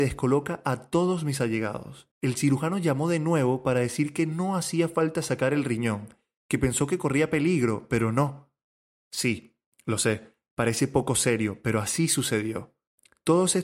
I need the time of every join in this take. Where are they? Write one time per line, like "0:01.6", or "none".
0:02.1

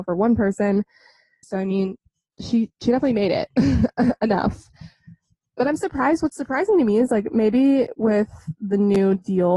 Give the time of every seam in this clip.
0:01.4

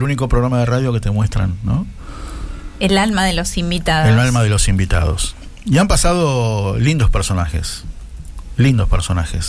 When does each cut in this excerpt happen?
none

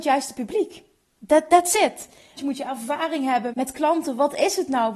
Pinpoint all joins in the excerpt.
0:02.4
0:03.5

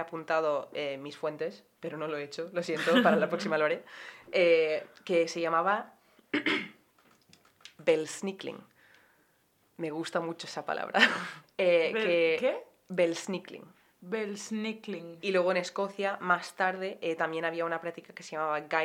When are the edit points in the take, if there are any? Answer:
0:11.4
0:15.2

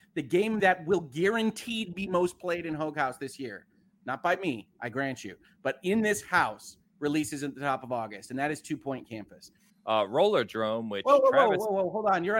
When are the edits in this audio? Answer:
0:09.7

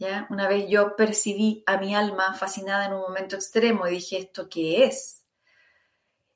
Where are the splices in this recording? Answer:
none

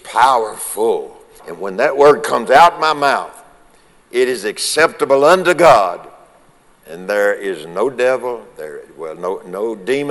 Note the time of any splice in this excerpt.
0:01.4

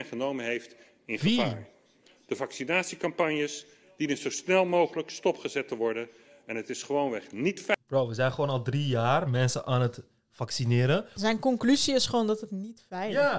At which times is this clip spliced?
none

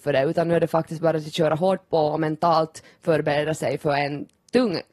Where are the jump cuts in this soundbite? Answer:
none

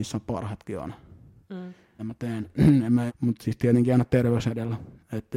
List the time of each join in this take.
0:02.0
0:03.1

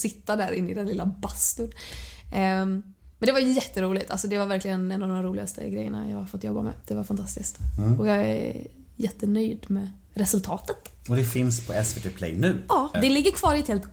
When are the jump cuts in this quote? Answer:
0:12.9

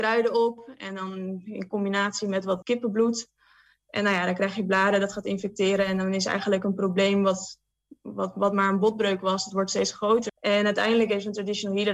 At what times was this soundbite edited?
0:02.6
0:10.3

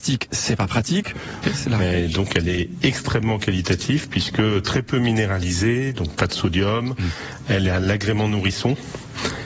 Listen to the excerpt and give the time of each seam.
0:01.4

